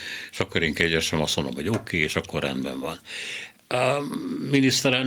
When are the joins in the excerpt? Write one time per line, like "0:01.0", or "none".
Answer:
none